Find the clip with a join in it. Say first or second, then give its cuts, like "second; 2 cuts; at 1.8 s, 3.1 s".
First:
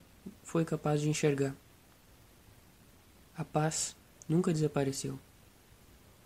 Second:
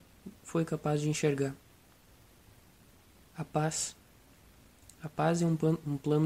first; 1 cut; at 4.1 s